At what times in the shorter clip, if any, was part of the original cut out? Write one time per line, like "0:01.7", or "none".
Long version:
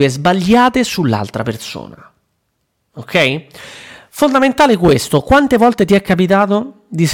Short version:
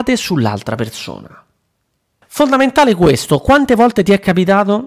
0:02.2